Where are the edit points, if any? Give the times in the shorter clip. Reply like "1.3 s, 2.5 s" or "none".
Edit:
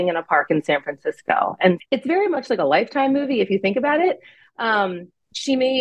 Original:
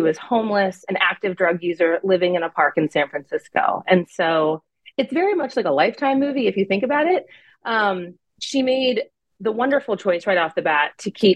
1.8 s